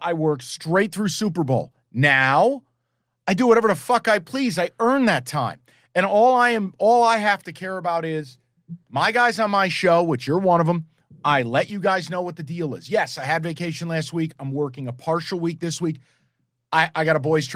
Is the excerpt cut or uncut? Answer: cut